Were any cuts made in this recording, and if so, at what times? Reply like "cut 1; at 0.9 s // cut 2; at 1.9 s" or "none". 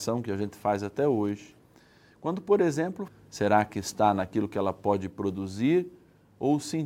cut 1; at 3.1 s